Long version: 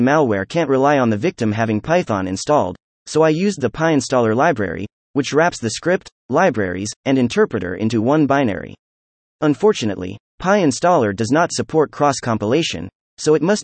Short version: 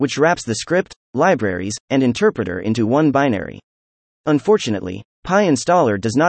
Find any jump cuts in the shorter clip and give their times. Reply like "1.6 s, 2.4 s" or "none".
none